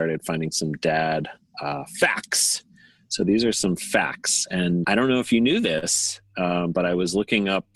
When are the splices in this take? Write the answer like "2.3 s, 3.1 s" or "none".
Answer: 4.8 s